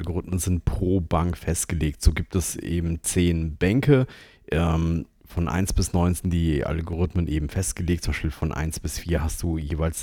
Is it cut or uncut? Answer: uncut